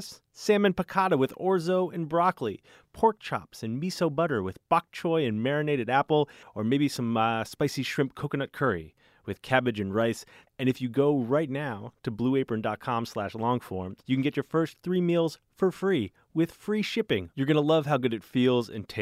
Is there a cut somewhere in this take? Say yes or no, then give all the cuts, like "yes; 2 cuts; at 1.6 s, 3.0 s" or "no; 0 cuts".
yes; 3 cuts; at 6.4 s, 10.5 s, 14.0 s